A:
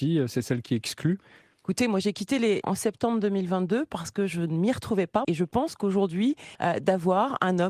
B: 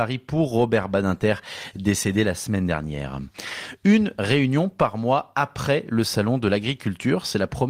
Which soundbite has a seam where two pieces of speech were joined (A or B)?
A